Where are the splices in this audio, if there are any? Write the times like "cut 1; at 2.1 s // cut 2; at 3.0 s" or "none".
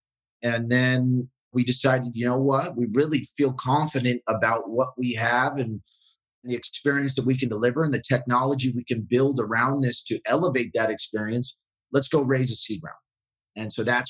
none

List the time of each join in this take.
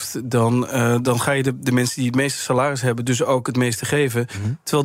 none

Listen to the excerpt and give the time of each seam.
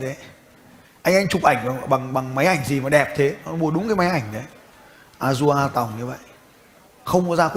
none

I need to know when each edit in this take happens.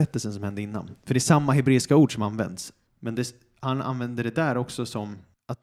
cut 1; at 2.9 s

